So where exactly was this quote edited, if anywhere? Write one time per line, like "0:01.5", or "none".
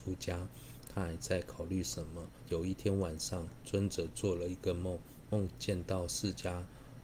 0:02.5
0:05.5